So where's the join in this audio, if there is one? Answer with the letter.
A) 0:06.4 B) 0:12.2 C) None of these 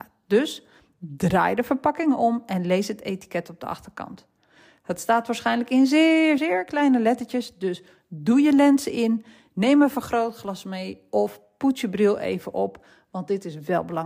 A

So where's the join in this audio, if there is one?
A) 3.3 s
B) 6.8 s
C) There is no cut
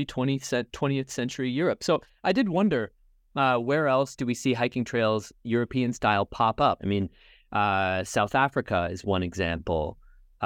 B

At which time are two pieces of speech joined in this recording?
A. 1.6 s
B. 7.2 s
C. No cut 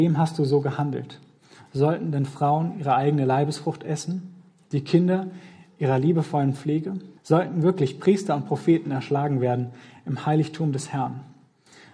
B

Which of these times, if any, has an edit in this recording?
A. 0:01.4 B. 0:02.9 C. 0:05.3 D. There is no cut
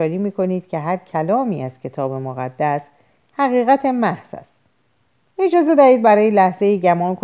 D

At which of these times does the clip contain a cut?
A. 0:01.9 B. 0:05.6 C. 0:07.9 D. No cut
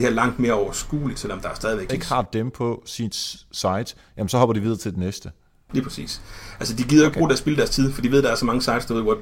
A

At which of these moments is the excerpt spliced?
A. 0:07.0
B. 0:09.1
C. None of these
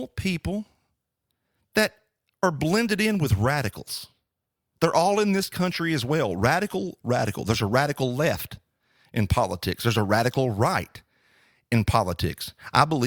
A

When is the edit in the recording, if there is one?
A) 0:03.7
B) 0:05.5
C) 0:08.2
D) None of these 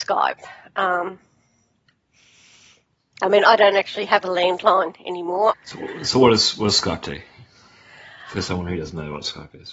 B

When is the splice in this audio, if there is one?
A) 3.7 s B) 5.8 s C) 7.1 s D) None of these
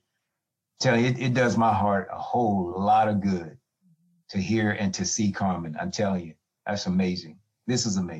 D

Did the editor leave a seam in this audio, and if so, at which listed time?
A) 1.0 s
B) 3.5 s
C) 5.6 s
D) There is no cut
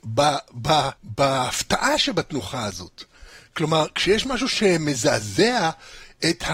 A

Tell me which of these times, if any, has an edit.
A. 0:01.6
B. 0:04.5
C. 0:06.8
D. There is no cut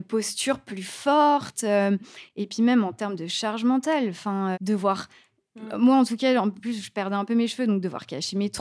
B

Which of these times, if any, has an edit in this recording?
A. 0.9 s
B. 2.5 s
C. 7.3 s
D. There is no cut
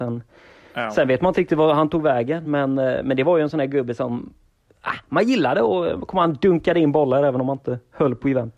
D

